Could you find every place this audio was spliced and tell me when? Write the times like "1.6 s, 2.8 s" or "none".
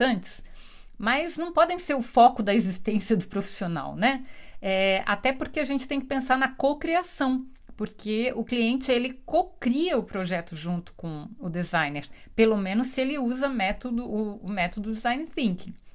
none